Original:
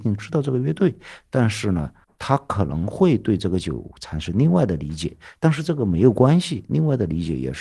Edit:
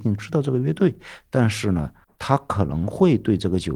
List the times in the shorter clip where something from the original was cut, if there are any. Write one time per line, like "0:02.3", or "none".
none